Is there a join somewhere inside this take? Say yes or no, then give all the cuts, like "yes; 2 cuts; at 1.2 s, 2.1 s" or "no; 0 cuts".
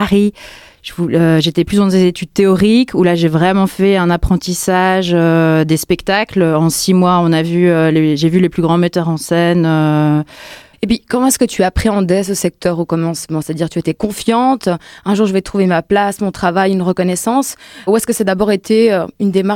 yes; 2 cuts; at 10.7 s, 17.9 s